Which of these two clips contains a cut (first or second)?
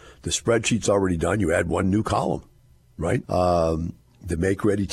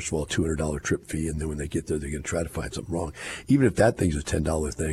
first